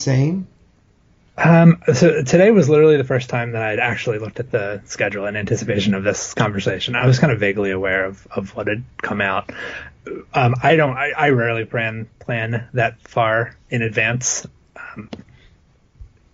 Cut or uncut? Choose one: uncut